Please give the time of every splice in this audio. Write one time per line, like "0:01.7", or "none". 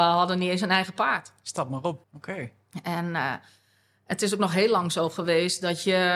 0:02.0